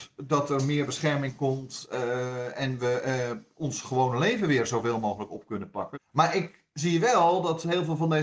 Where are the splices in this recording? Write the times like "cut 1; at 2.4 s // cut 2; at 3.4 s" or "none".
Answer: cut 1; at 5.9 s